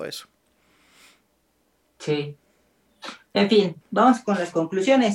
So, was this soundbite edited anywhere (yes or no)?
yes